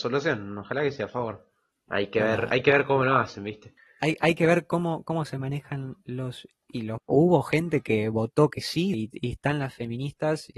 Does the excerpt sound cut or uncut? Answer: cut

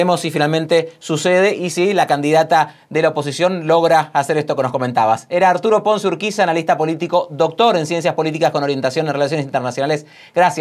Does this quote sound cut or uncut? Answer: uncut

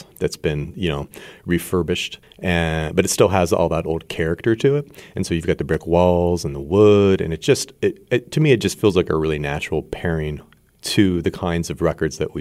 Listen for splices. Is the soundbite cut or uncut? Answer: uncut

